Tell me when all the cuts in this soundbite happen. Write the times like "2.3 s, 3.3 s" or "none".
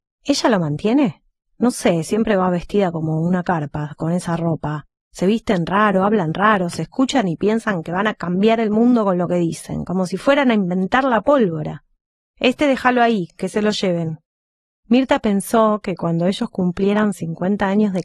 1.5 s, 12.3 s